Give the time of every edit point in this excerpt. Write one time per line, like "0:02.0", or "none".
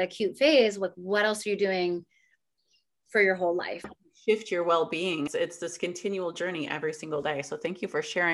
0:03.8
0:05.3